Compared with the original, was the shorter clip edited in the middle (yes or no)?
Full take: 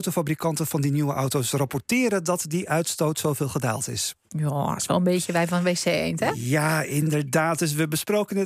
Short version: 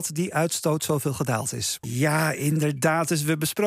yes